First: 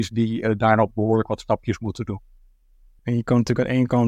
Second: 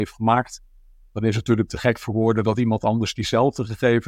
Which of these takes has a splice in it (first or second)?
first